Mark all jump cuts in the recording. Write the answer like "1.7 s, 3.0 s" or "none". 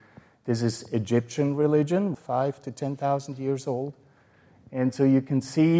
2.1 s